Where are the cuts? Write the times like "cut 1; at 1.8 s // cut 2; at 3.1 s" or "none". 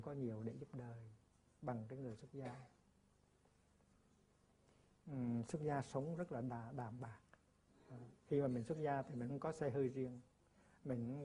none